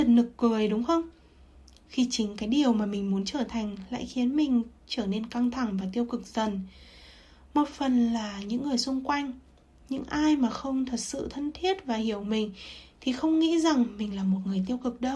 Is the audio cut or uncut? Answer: uncut